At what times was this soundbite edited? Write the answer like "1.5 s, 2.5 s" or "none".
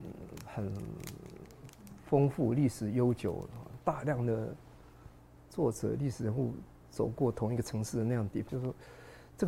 3.8 s, 8.5 s